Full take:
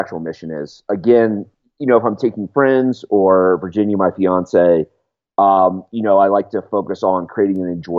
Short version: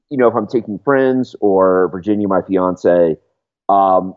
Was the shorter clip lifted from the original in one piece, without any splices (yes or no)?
yes